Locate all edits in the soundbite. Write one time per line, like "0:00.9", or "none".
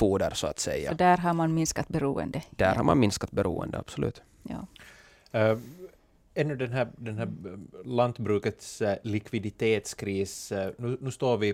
none